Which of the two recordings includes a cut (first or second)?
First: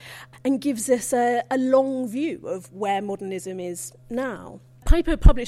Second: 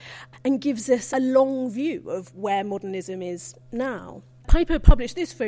second